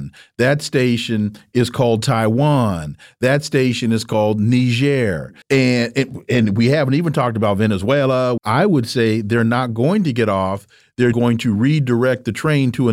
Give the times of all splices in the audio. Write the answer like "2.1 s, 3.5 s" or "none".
5.4 s, 8.4 s, 11.1 s